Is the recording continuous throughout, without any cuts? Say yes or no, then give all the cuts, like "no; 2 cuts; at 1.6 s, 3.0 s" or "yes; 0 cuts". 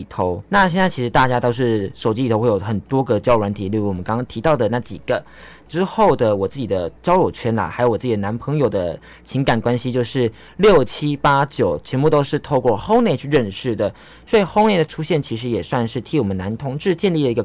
yes; 0 cuts